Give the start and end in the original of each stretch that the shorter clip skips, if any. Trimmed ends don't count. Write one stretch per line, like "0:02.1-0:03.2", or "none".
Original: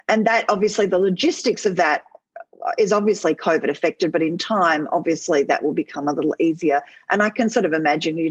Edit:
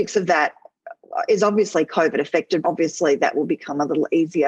0:04.1-0:04.9